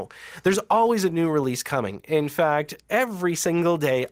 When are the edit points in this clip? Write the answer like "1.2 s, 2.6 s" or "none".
none